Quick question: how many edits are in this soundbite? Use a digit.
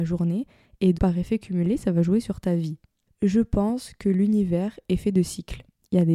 2